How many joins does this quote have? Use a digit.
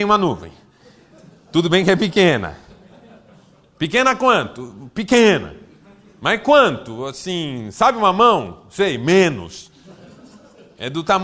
0